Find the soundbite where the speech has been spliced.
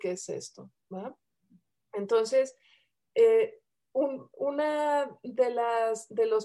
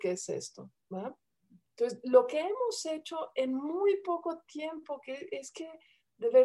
second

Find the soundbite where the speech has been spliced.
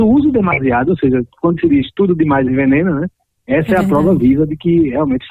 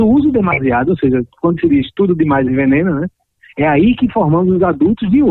second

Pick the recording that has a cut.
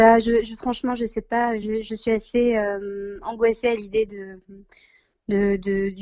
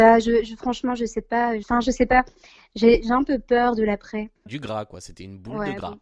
second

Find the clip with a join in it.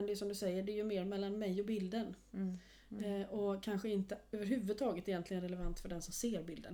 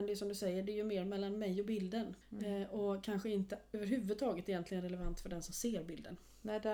second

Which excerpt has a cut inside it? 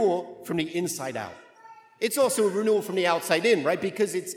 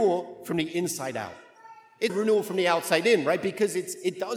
second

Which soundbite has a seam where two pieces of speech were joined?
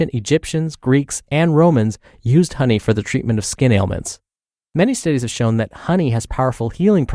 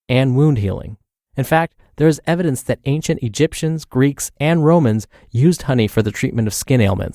second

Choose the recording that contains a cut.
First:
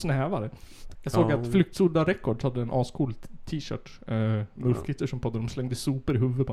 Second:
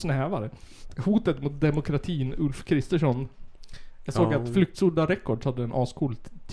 first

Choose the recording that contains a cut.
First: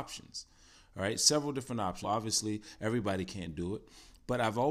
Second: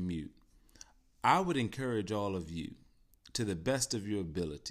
first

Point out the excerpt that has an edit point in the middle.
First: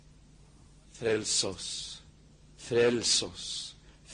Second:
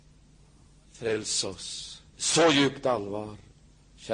second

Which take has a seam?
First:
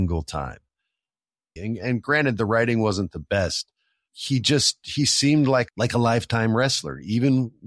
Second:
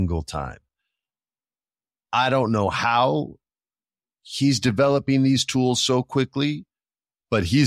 first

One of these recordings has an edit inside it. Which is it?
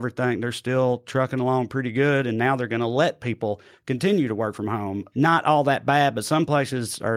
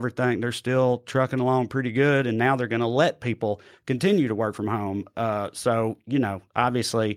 first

